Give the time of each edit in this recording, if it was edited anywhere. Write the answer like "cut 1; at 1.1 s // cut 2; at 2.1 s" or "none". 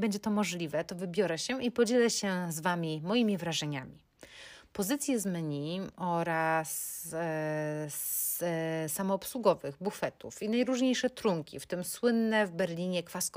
none

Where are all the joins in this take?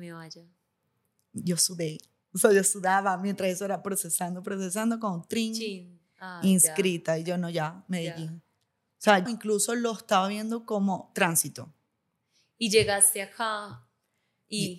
cut 1; at 9.3 s

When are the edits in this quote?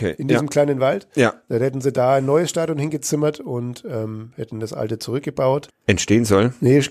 cut 1; at 5.7 s

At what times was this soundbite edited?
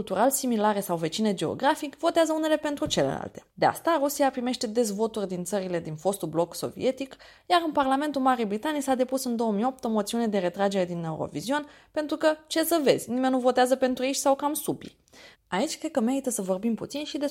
cut 1; at 3.5 s // cut 2; at 7.4 s // cut 3; at 15.3 s

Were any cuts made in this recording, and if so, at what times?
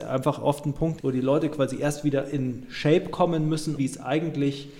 cut 1; at 1.0 s // cut 2; at 3.8 s

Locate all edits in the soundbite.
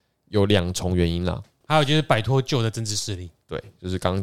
cut 1; at 1.6 s

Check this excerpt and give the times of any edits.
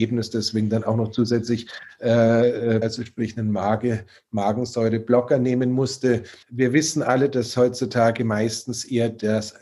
cut 1; at 2.8 s // cut 2; at 6.4 s

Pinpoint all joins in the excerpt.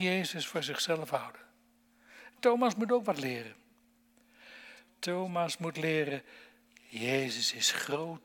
none

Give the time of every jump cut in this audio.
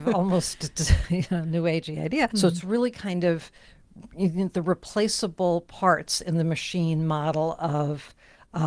cut 1; at 2.3 s

